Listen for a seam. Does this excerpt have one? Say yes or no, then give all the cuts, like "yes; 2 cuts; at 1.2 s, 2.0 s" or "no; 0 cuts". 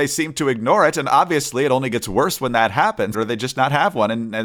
yes; 1 cut; at 3.1 s